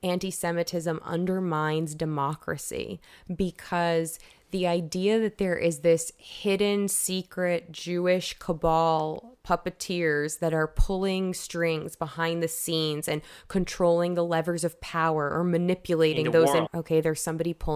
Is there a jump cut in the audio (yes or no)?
yes